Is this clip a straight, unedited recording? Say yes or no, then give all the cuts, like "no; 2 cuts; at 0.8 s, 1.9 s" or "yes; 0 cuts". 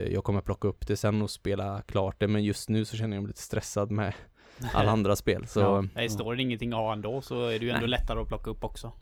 yes; 0 cuts